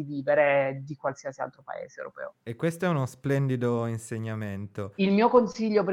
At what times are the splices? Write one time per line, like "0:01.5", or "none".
0:02.4
0:05.0